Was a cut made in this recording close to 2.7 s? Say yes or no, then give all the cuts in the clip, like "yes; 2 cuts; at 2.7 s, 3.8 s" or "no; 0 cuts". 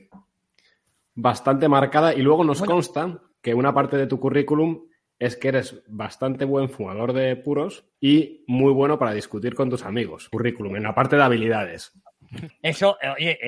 no; 3 cuts; at 7.9 s, 10.3 s, 12.5 s